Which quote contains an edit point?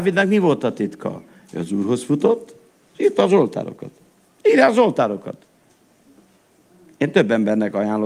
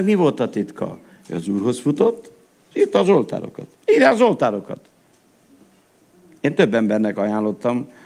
second; 1 cut; at 3.7 s

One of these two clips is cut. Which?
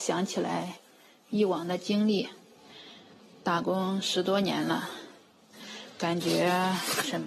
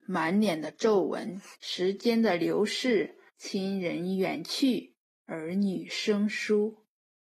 second; 2 cuts; at 1.5 s, 3.3 s

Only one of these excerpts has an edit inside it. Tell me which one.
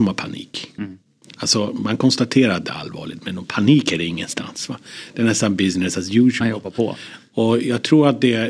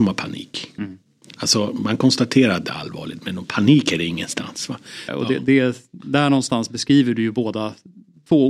second; 1 cut; at 5.1 s

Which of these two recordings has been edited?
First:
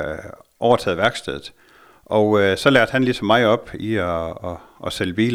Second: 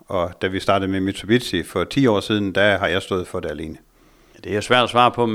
second; 1 cut; at 4.3 s

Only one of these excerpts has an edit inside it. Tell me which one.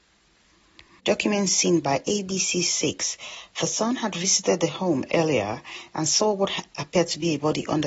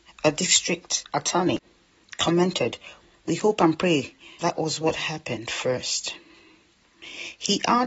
second; 1 cut; at 4.4 s

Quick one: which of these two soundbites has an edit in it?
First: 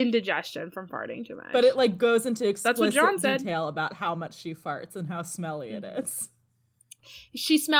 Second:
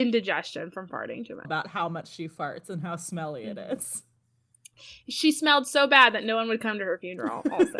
second; 1 cut; at 1.4 s

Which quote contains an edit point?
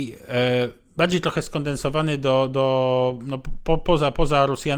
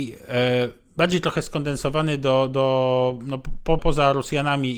second; 1 cut; at 3.8 s

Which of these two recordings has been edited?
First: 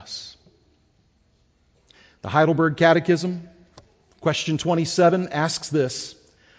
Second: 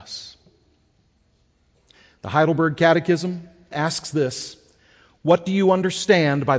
second; 1 cut; at 3.7 s

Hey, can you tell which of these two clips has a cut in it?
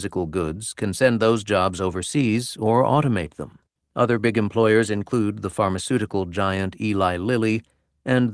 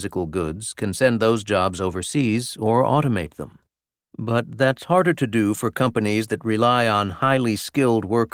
first; 1 cut; at 3.8 s

